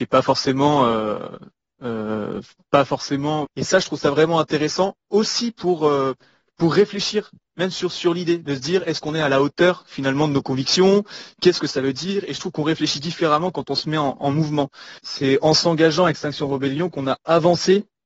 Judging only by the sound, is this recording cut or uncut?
cut